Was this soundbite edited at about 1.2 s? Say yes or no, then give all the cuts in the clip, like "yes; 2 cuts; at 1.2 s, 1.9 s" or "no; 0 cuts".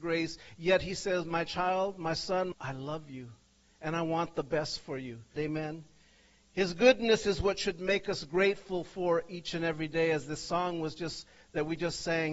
no; 2 cuts; at 2.5 s, 5.4 s